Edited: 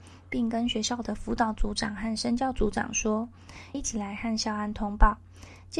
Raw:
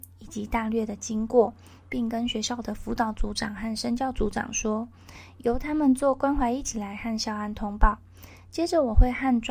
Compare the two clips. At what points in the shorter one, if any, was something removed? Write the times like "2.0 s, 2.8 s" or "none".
3.7 s

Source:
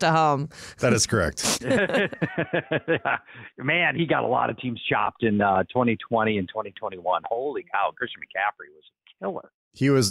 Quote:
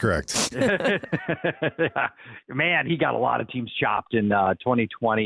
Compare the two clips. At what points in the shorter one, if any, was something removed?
none

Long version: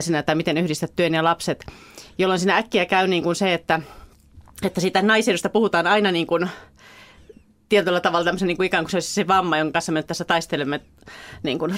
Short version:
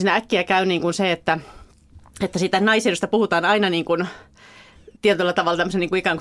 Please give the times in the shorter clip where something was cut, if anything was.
5.0 s

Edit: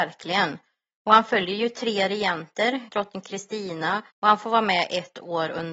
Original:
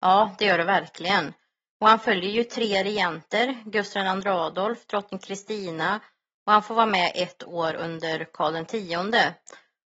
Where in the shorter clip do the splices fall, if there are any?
2.9 s, 4.1 s

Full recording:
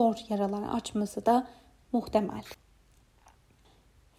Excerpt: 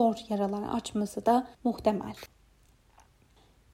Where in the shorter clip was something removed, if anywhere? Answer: 1.5 s

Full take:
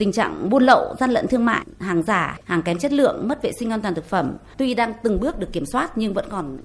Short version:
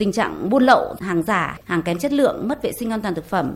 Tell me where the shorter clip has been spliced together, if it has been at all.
1.0 s

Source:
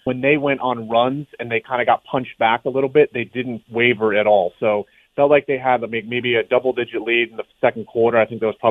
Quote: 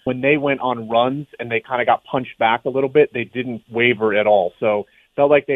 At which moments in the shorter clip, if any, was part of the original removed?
none

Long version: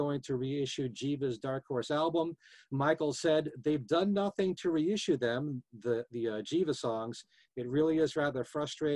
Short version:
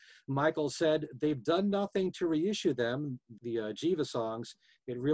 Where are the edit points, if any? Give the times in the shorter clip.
3.4 s

